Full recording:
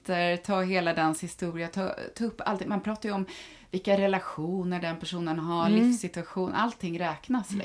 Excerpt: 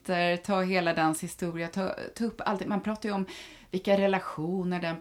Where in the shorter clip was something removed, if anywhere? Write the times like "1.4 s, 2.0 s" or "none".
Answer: none